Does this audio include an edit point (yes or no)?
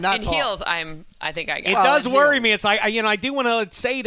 no